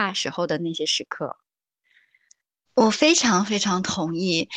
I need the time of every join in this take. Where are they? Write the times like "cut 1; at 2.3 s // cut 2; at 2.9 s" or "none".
cut 1; at 2.7 s